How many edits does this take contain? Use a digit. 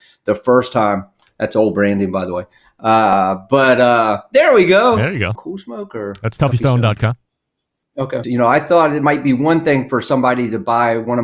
2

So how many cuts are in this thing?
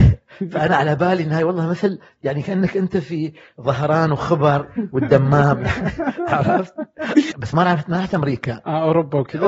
1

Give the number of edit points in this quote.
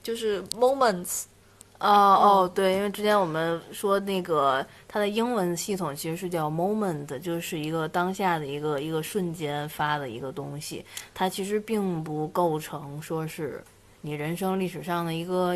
0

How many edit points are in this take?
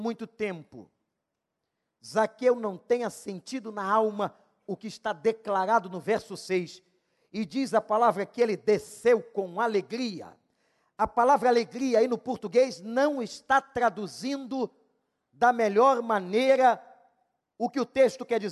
0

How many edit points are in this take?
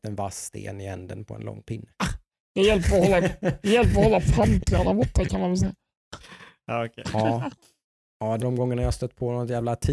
1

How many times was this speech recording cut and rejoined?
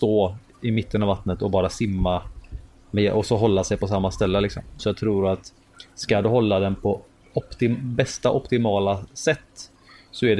1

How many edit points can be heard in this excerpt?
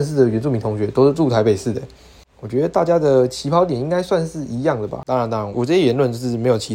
1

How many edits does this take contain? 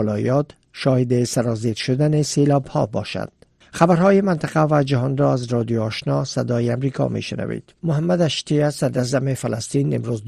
1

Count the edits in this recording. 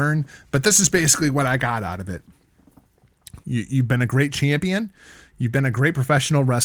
1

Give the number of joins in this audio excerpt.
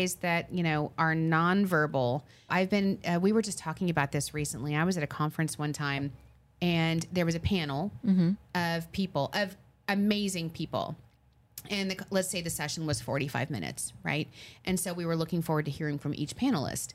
1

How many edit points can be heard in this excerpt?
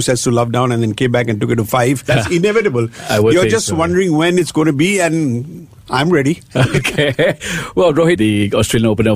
2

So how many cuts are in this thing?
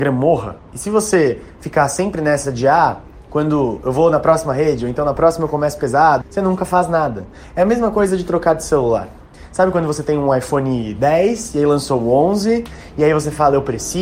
1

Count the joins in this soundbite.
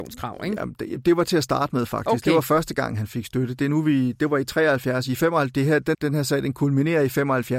1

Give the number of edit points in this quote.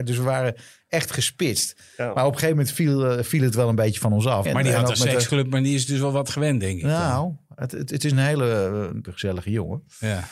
2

